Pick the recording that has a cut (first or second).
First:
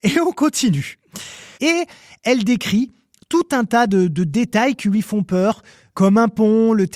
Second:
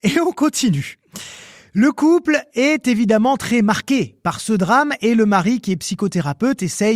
first